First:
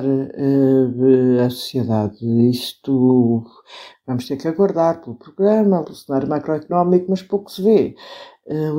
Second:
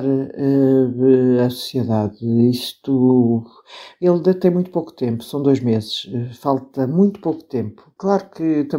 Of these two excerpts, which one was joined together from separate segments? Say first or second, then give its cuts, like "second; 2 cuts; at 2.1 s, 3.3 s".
first; 2 cuts; at 3.9 s, 5.8 s